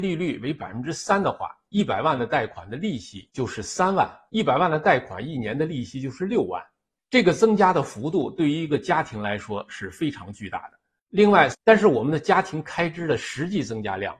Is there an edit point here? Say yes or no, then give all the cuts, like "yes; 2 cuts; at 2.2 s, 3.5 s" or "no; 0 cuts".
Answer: yes; 2 cuts; at 4.3 s, 11.5 s